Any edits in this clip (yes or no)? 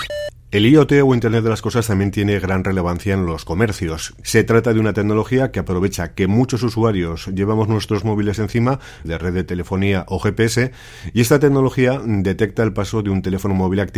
yes